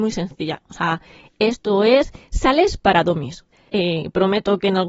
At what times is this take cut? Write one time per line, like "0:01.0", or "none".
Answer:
0:03.7